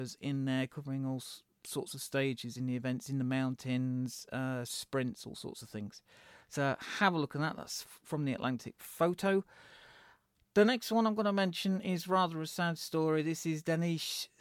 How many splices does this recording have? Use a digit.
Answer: 0